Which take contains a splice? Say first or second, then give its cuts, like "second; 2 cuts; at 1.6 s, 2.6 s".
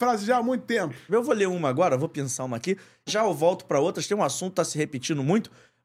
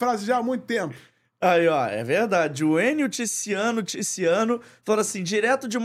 first; 2 cuts; at 1.1 s, 3.1 s